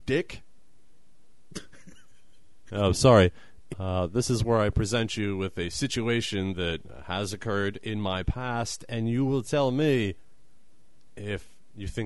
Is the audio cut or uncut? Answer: cut